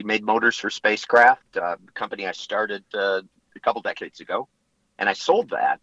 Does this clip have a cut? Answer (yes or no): no